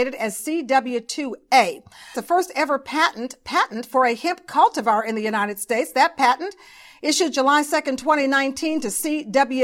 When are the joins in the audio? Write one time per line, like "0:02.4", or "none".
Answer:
0:02.1